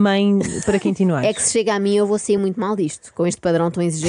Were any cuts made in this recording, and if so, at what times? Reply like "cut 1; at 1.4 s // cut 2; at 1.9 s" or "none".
none